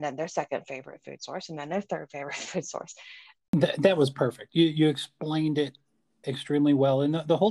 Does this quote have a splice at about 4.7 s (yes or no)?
no